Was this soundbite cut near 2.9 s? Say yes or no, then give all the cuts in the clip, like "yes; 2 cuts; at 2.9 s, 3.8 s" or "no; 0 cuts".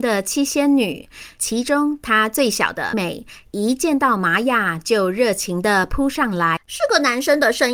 yes; 2 cuts; at 2.9 s, 6.6 s